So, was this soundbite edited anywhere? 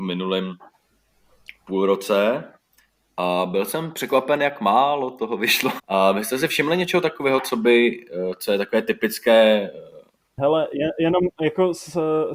yes; 1 cut; at 5.8 s

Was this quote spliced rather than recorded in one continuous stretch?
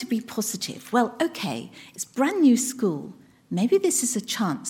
no; 0 cuts

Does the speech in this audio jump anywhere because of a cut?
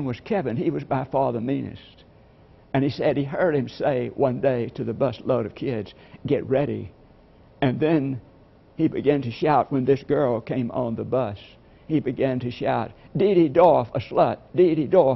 no; 0 cuts

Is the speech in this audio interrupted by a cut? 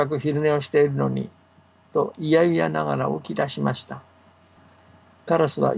no; 0 cuts

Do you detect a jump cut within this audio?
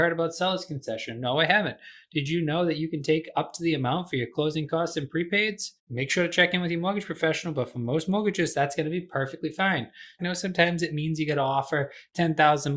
yes; 2 cuts; at 5.8 s, 10.2 s

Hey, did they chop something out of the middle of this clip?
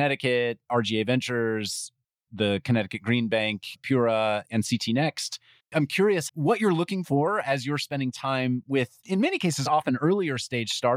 no; 0 cuts

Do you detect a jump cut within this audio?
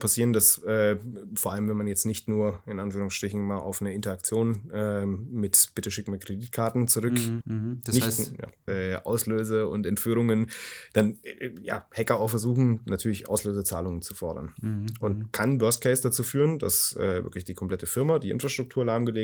yes; 2 cuts; at 7.4 s, 8.7 s

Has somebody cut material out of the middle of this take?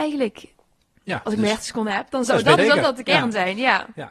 yes; 1 cut; at 2.6 s

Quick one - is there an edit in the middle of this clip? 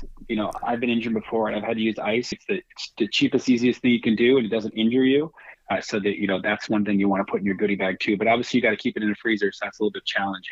yes; 2 cuts; at 2.3 s, 5.6 s

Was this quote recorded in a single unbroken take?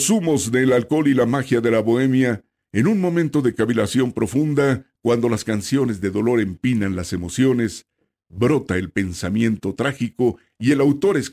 yes; 0 cuts

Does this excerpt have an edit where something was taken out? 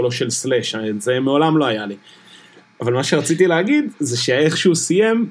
no; 0 cuts

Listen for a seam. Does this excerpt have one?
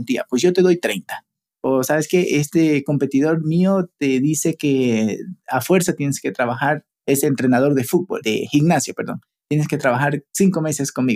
no; 0 cuts

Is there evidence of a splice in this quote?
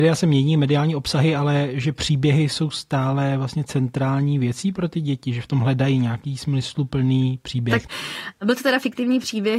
yes; 1 cut; at 7.9 s

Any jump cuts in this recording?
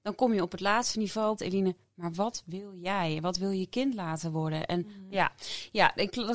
yes; 2 cuts; at 1.4 s, 5.1 s

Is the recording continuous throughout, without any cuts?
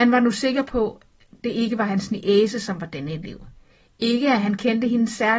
yes; 0 cuts

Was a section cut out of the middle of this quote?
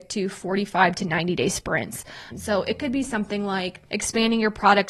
yes; 1 cut; at 2.3 s

